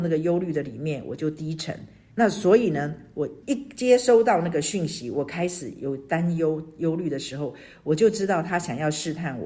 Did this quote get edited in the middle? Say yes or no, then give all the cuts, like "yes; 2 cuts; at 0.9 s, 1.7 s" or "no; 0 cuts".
yes; 2 cuts; at 2.1 s, 3.4 s